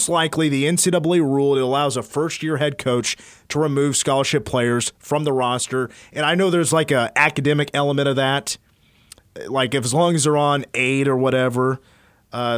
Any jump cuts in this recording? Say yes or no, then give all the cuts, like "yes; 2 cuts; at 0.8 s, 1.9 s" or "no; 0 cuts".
no; 0 cuts